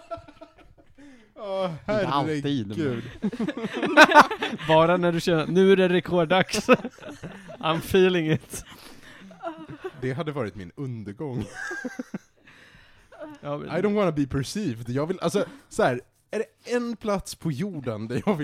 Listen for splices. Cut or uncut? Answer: uncut